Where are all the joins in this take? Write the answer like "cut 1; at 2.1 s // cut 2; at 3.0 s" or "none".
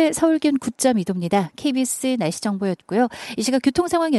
none

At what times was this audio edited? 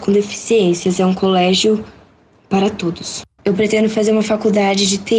cut 1; at 3.4 s

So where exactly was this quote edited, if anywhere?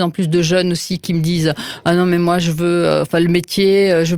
none

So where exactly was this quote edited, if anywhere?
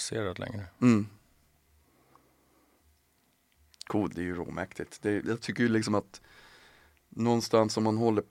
cut 1; at 4.1 s // cut 2; at 5.2 s

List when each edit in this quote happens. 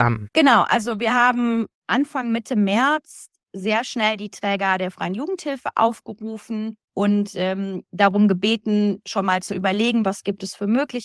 cut 1; at 10.0 s

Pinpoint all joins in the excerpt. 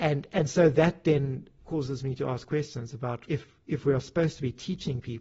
cut 1; at 3.3 s

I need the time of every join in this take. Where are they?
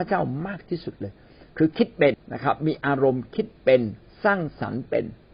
cut 1; at 2.1 s

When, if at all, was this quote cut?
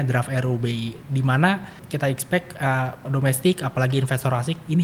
cut 1; at 3.0 s

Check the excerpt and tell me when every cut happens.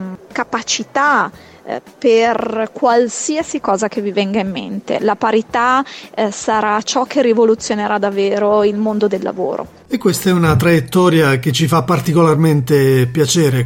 none

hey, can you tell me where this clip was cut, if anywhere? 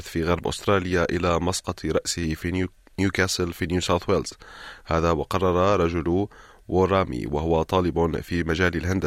none

